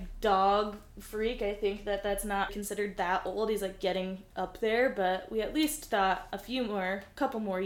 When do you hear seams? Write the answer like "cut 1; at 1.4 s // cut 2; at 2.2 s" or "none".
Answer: cut 1; at 2.5 s